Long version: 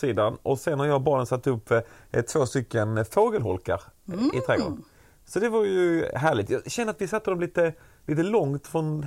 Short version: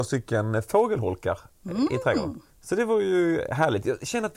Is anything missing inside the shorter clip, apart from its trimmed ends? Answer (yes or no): yes